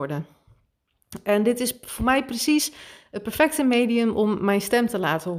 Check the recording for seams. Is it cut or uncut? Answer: uncut